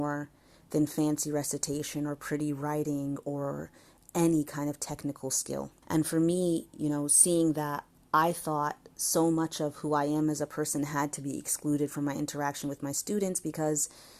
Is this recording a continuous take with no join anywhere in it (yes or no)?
no